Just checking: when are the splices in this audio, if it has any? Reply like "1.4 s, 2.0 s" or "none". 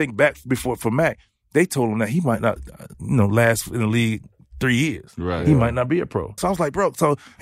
6.4 s